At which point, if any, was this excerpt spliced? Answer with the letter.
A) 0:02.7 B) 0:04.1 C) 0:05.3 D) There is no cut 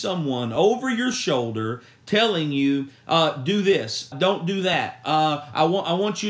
B